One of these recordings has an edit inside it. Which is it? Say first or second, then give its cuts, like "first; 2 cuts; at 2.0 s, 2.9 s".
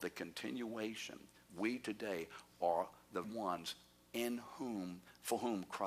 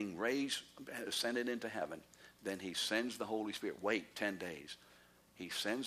first; 1 cut; at 3.2 s